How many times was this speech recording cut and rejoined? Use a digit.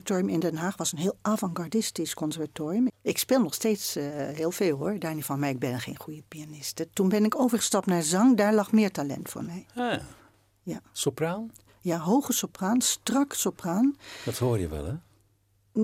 1